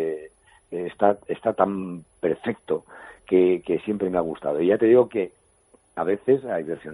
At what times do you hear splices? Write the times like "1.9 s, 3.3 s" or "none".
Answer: none